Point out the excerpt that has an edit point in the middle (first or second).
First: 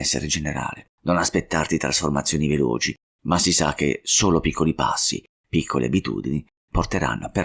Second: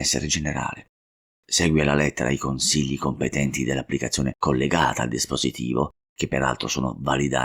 first